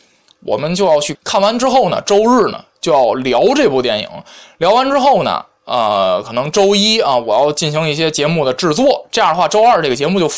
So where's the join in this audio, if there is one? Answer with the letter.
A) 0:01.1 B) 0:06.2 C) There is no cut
A